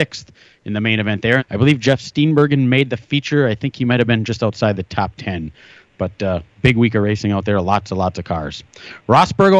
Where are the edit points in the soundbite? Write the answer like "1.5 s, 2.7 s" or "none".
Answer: 1.4 s